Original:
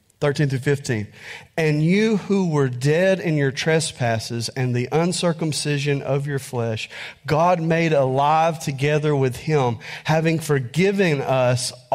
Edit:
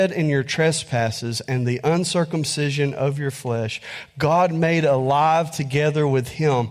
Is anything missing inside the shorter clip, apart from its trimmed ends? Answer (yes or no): no